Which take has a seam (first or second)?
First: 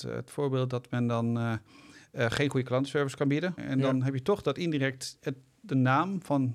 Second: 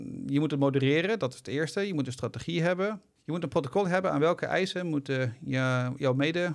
first